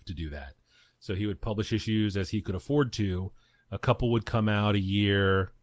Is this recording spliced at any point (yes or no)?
no